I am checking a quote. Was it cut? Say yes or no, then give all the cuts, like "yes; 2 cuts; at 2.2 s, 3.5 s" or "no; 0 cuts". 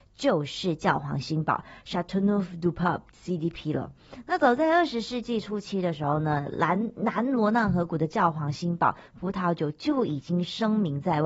no; 0 cuts